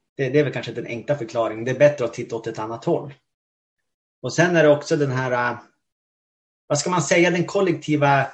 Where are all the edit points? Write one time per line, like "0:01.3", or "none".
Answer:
none